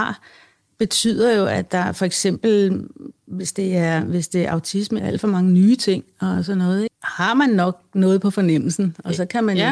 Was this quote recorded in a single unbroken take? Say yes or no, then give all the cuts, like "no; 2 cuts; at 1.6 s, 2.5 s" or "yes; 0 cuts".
no; 2 cuts; at 5.0 s, 6.9 s